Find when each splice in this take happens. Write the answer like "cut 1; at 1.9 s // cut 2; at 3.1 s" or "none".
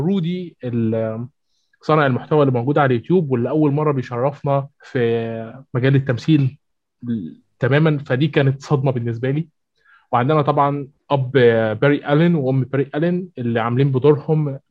cut 1; at 4.7 s